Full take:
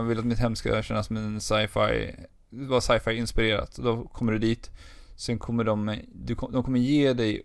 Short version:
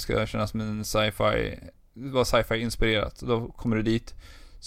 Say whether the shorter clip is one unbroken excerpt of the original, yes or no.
yes